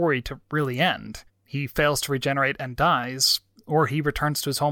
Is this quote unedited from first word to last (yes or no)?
yes